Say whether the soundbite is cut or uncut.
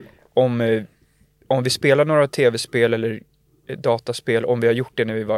uncut